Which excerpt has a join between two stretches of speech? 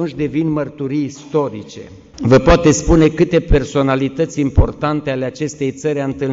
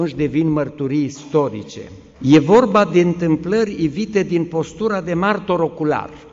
first; 1 cut; at 2.1 s

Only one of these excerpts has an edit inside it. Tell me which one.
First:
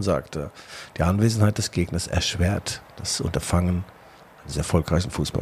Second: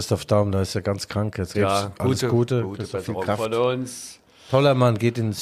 second; 1 cut; at 1.5 s

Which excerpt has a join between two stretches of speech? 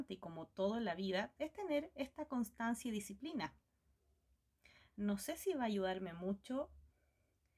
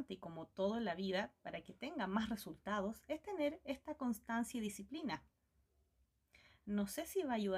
first; 1 cut; at 1.4 s

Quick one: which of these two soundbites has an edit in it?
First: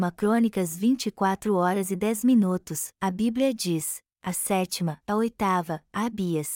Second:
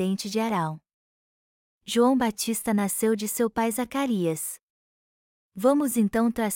first; 1 cut; at 5.0 s

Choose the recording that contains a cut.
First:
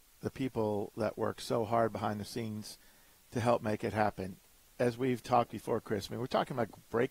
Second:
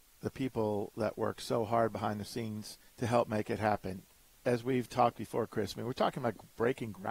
second; 1 cut; at 2.9 s

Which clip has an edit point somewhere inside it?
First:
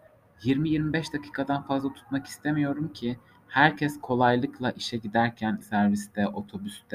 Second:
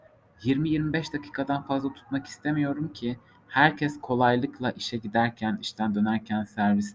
first; 1 cut; at 5.6 s

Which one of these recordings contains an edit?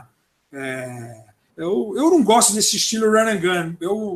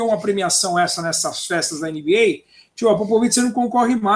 first; 1 cut; at 1.5 s

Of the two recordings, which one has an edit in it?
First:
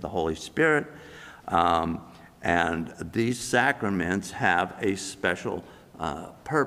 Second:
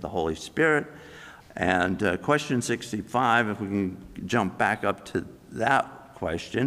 second; 1 cut; at 1.4 s

